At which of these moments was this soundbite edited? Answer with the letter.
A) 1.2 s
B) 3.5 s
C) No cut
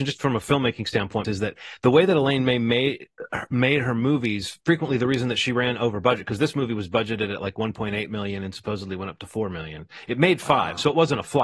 A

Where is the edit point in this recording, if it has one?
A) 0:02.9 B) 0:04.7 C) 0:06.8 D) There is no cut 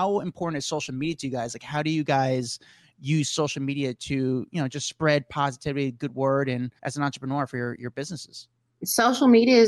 C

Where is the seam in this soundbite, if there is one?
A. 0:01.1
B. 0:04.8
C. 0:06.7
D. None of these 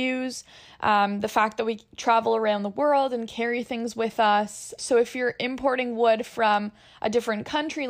B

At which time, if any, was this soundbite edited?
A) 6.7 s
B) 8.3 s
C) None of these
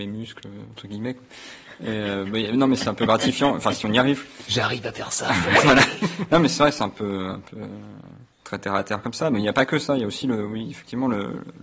B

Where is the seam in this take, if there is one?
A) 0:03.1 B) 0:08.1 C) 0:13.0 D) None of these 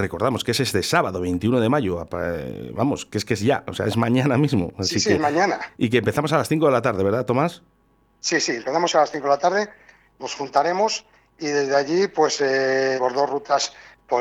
C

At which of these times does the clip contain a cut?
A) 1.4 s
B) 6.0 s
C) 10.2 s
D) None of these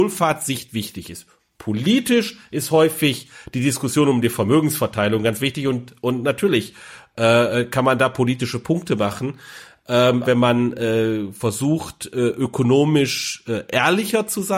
C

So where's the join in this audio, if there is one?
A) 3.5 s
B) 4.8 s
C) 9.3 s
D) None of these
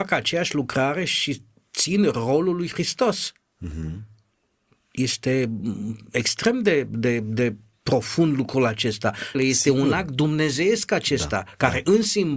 C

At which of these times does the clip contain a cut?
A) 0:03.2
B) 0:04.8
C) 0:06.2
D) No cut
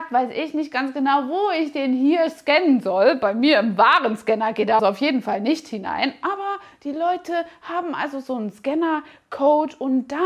B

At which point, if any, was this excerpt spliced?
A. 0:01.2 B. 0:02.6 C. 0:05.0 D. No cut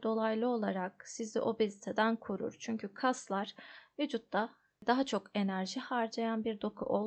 D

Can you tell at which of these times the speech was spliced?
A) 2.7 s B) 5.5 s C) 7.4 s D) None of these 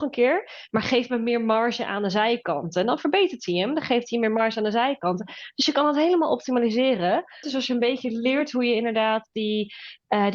C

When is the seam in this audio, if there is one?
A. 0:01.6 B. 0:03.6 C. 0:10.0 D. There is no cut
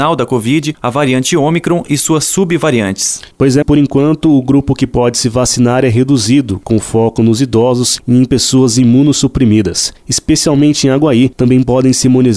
B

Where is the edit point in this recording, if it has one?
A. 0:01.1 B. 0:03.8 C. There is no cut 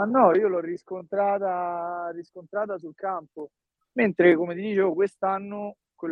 B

